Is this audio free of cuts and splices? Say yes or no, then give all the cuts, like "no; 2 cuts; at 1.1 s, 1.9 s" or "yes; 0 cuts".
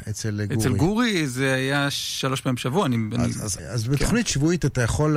yes; 0 cuts